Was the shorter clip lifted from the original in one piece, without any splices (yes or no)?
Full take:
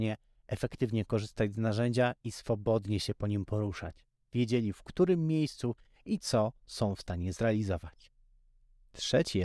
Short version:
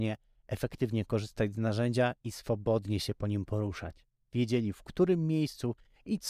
yes